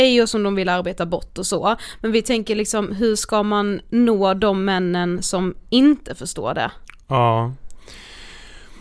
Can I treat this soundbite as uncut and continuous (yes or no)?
yes